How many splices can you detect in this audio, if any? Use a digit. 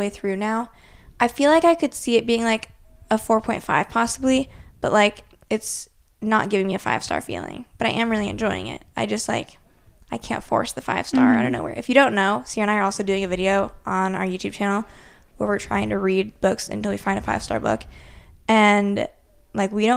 0